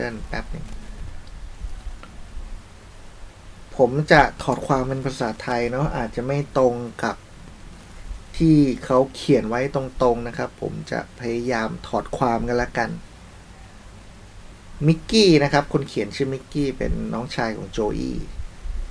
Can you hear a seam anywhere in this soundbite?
no; 0 cuts

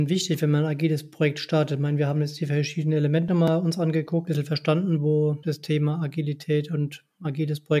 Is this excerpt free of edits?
yes; 0 cuts

